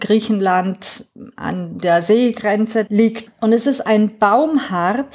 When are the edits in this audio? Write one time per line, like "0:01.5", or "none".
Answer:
0:03.3